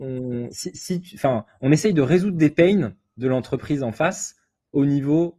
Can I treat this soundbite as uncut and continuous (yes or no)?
yes